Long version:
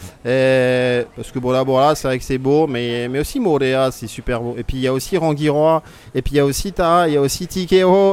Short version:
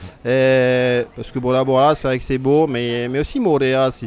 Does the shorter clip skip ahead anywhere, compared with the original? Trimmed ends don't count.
no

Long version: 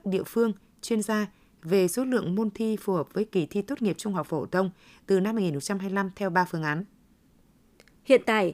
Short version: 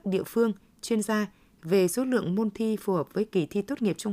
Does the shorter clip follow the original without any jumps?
yes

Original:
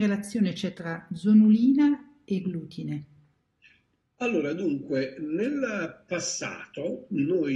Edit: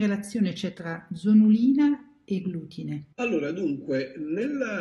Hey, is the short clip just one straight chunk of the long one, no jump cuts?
no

